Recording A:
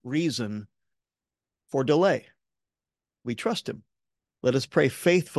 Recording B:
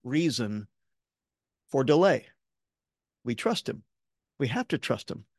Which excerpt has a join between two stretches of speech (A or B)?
A